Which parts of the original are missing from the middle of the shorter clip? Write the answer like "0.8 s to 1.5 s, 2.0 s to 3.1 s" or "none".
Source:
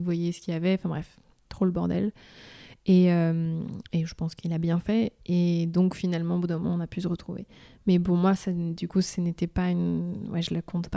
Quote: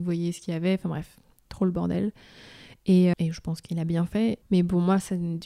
3.1 s to 3.9 s, 5.2 s to 7.8 s